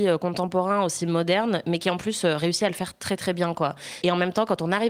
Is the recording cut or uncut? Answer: cut